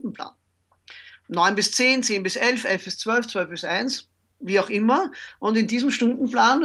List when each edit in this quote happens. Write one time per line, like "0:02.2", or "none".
none